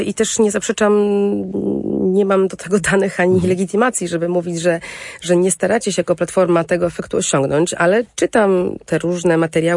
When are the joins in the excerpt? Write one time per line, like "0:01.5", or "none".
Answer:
none